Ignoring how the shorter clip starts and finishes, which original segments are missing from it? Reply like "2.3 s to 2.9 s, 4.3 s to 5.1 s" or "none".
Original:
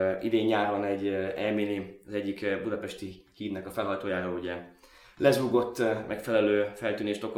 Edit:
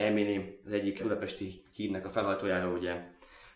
2.4 s to 2.6 s